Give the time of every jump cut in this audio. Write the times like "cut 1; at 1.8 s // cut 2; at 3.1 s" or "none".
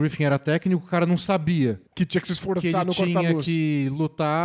cut 1; at 1.9 s